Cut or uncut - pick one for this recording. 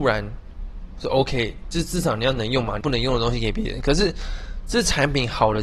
cut